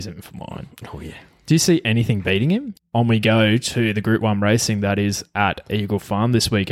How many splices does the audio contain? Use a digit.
1